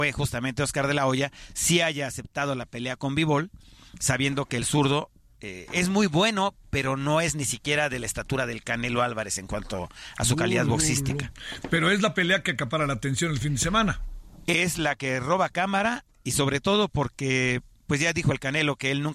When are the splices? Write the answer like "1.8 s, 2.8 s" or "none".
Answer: none